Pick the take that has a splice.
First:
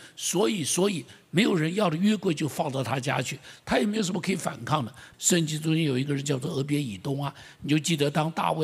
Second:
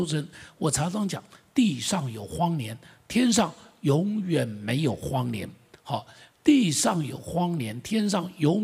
first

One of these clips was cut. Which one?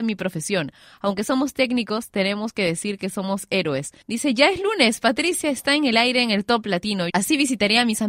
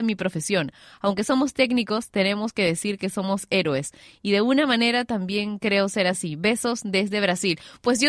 first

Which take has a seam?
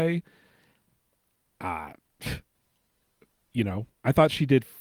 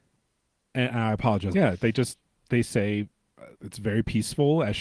second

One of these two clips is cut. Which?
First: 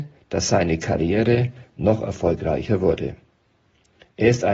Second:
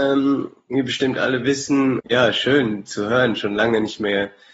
second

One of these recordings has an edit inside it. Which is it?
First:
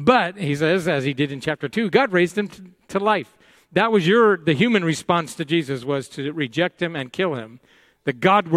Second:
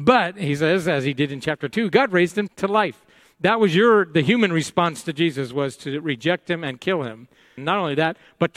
second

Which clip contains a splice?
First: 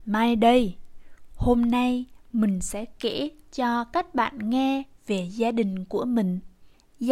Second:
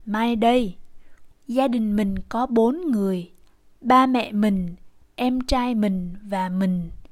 second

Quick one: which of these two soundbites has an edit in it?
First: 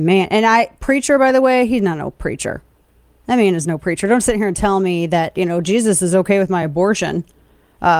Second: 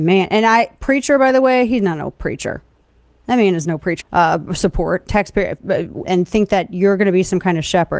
second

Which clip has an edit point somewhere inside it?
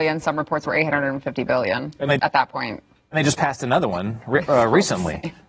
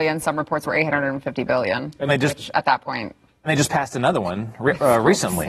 first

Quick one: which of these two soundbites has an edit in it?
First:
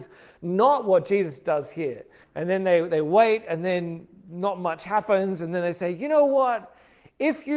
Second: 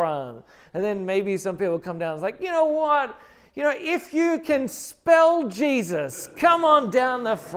first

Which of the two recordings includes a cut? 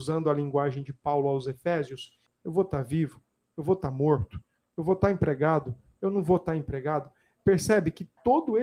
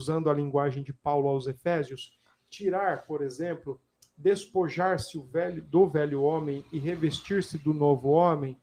first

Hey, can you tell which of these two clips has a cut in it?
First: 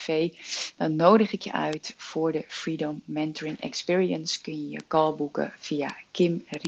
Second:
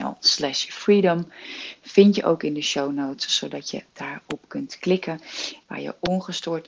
second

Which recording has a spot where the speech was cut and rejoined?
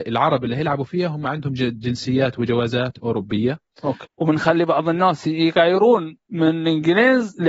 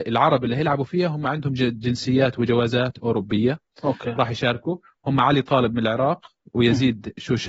first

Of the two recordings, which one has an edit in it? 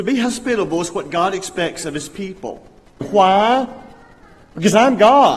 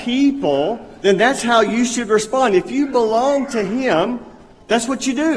first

